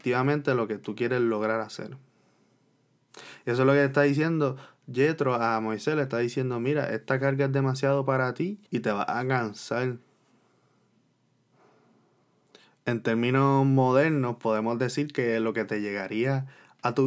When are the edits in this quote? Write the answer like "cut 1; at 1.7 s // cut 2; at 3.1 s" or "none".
cut 1; at 8.7 s

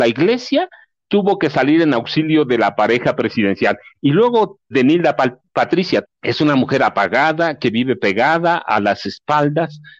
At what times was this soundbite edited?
cut 1; at 4.7 s // cut 2; at 6.0 s

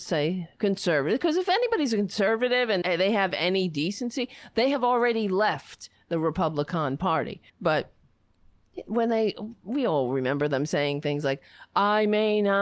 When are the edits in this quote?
cut 1; at 2.8 s // cut 2; at 7.5 s

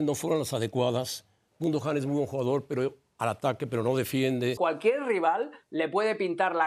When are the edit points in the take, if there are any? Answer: cut 1; at 4.6 s

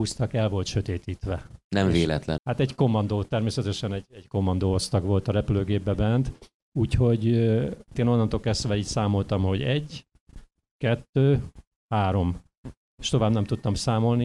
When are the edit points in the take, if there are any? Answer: cut 1; at 2.4 s // cut 2; at 8.0 s

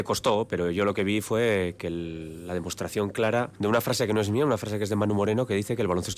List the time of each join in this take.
cut 1; at 3.6 s

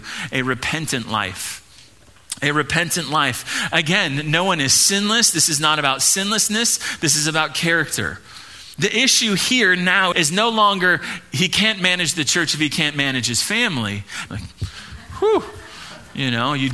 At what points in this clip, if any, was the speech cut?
cut 1; at 10.1 s // cut 2; at 14.3 s

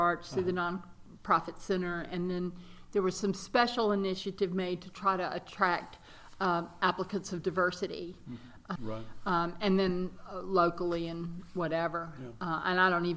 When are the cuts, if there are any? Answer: cut 1; at 8.8 s

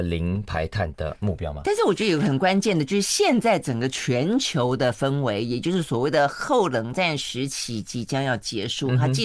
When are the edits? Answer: none

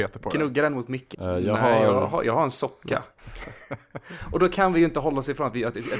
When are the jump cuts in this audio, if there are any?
cut 1; at 1.1 s // cut 2; at 3.2 s

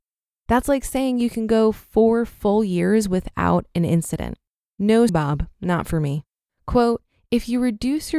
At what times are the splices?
cut 1; at 5.1 s // cut 2; at 6.5 s

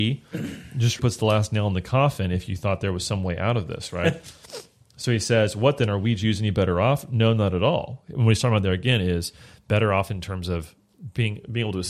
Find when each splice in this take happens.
cut 1; at 1.0 s

